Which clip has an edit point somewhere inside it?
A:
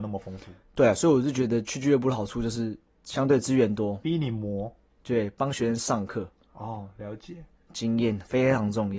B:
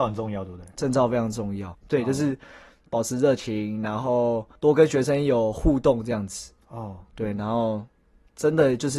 B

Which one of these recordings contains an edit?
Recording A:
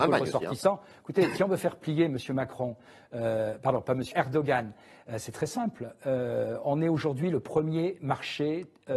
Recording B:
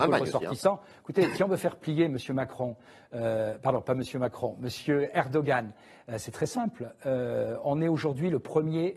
A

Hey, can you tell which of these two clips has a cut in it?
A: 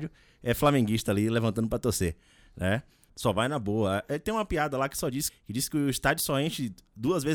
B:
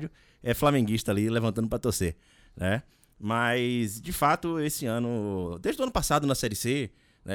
A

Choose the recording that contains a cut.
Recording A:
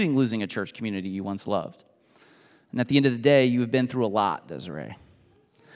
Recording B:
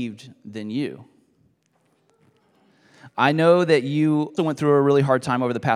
B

